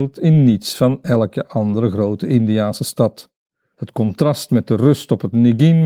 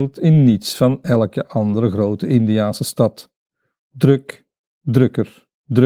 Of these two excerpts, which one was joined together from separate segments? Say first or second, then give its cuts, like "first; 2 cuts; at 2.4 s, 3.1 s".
first; 1 cut; at 3.7 s